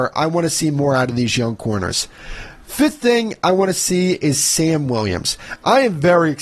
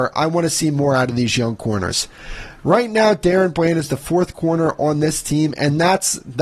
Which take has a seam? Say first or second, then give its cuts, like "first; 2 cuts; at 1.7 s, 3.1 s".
second; 1 cut; at 2.6 s